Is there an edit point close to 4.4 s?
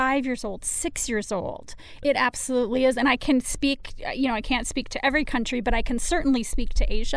no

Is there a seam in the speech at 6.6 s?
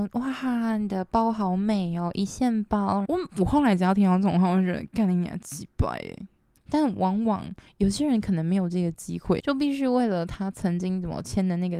yes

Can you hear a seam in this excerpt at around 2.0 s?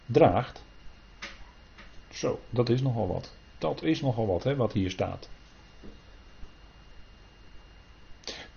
no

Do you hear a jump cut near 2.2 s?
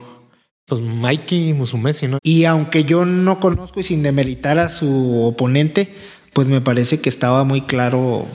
yes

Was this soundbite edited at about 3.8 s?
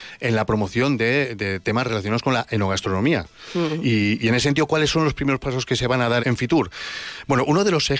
no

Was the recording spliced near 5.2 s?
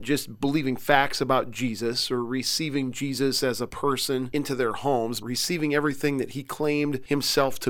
yes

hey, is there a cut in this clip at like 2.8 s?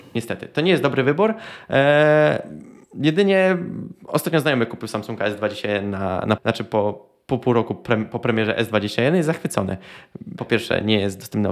no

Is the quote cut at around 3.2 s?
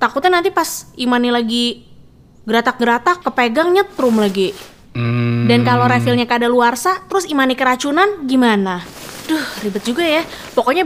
yes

